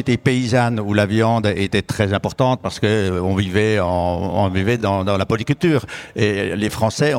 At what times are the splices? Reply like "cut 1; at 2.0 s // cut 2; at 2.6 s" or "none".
none

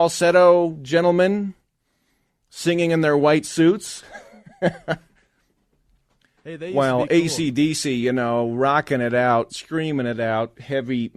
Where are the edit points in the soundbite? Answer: cut 1; at 9.5 s

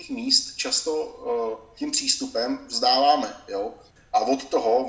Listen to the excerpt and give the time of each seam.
cut 1; at 4.0 s

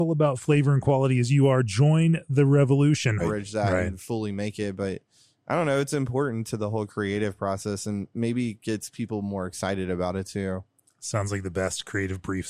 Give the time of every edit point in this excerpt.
cut 1; at 3.2 s

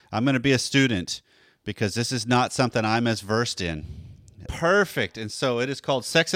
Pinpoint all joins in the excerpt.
cut 1; at 4.5 s

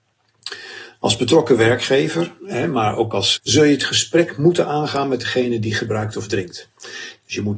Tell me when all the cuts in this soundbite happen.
cut 1; at 3.4 s

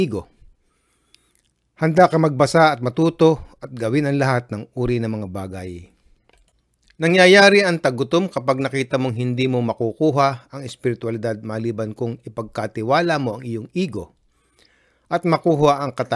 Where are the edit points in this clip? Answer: none

